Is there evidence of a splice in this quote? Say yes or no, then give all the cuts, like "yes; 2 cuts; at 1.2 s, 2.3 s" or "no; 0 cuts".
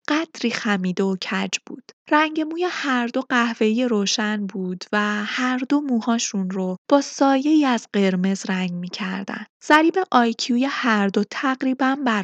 no; 0 cuts